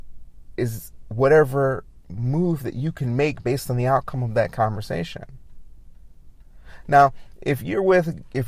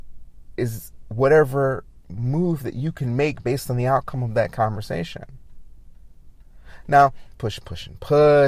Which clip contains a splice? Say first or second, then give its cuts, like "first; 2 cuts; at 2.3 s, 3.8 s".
second; 1 cut; at 7.3 s